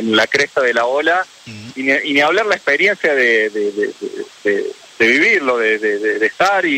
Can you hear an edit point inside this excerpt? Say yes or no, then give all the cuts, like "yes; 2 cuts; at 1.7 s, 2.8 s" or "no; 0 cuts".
no; 0 cuts